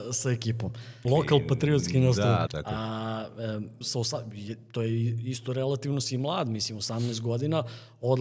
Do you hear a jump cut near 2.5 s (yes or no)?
yes